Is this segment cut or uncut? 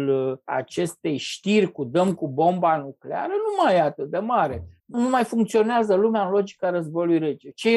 uncut